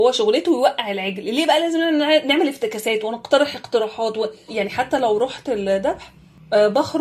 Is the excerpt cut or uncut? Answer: cut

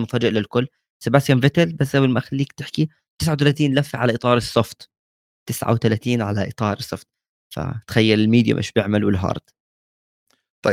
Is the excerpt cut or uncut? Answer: uncut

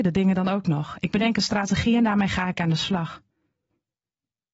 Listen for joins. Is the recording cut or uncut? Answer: uncut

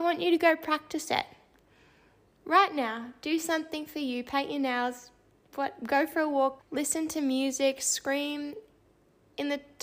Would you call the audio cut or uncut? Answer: cut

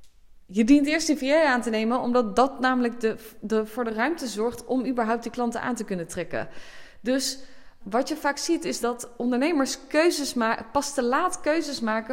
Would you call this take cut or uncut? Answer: cut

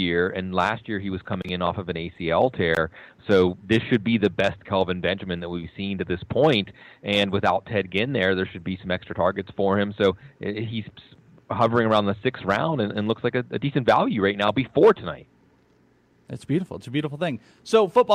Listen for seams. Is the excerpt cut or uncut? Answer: uncut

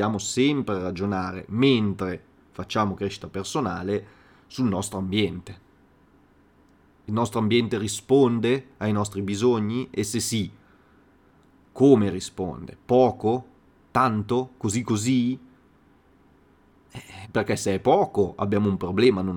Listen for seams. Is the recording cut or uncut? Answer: cut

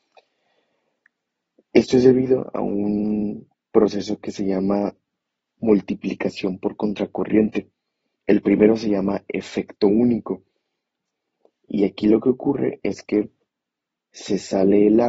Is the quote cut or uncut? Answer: cut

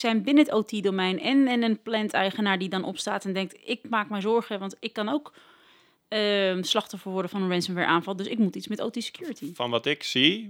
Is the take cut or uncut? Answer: uncut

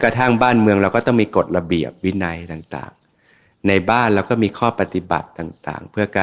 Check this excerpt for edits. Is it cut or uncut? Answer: uncut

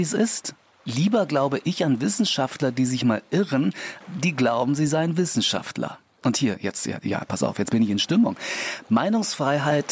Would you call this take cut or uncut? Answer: cut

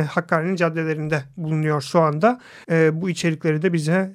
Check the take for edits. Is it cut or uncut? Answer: cut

